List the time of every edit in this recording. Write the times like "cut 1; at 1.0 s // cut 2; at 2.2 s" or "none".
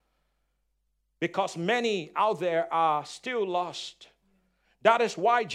none